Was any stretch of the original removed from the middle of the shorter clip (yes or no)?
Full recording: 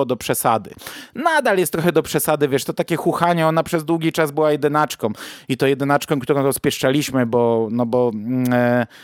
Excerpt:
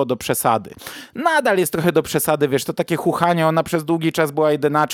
no